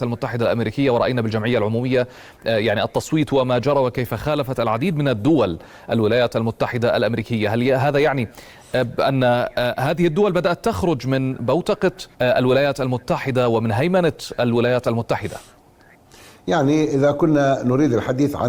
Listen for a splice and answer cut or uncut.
cut